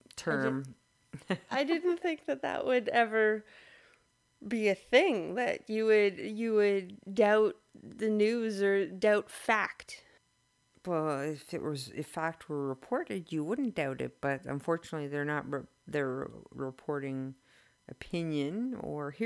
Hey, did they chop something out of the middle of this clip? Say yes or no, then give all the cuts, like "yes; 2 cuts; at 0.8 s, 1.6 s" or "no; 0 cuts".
no; 0 cuts